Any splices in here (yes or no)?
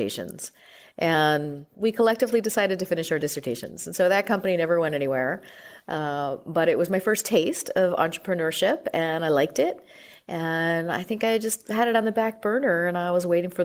no